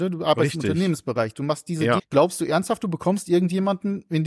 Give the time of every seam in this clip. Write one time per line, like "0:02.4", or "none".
0:02.0